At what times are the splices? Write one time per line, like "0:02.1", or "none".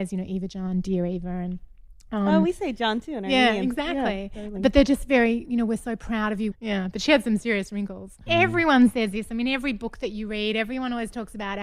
0:06.5
0:08.3